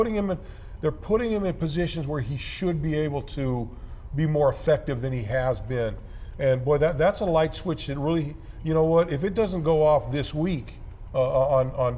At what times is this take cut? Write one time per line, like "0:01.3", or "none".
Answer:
none

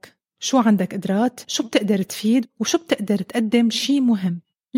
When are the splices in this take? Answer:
0:01.4

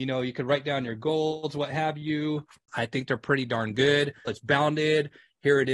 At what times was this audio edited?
0:02.7
0:04.3

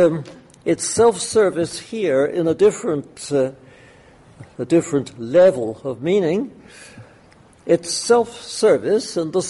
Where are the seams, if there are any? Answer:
none

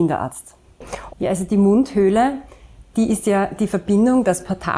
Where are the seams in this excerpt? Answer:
0:01.1

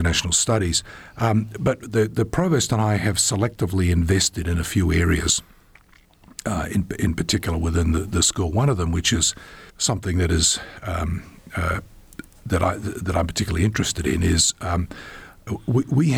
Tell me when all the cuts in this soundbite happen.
0:09.7

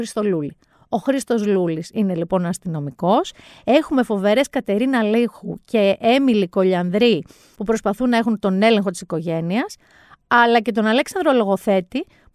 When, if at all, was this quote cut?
0:07.6

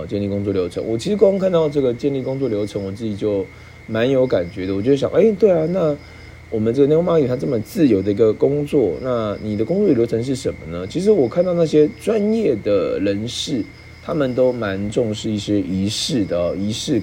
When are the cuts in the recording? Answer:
none

